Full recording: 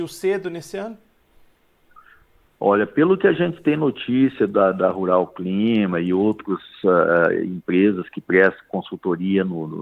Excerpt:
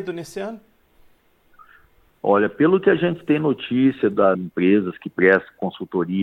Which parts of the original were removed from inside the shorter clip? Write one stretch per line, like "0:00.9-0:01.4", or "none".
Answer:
0:04.7-0:07.5